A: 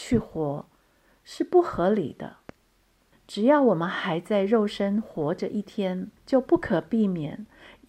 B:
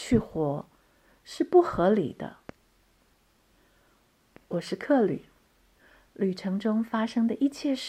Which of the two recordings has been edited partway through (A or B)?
A